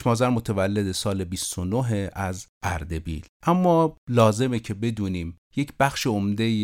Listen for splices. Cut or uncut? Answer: cut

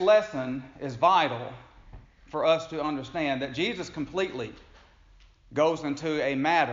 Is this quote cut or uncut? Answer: uncut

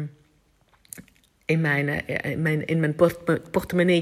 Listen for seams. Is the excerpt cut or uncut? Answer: uncut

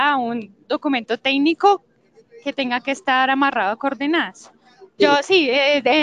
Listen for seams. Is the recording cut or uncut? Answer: cut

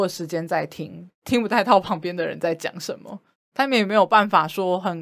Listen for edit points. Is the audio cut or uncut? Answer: cut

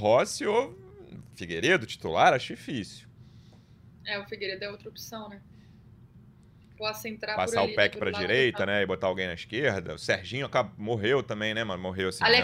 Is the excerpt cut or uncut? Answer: cut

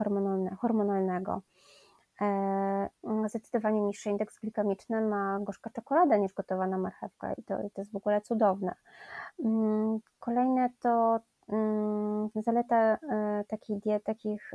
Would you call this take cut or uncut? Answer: cut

